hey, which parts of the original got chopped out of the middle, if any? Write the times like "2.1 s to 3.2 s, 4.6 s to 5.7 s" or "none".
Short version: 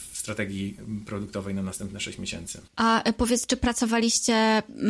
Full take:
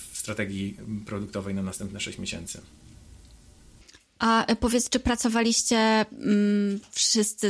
2.7 s to 4.1 s